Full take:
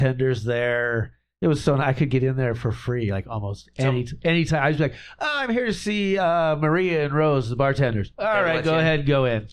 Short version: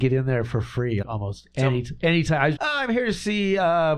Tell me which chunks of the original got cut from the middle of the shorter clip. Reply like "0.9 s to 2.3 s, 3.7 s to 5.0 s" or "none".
3.1 s to 3.2 s, 4.8 s to 5.2 s